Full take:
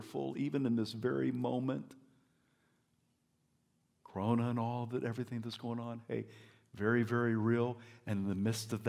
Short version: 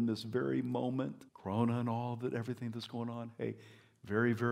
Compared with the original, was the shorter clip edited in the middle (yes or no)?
yes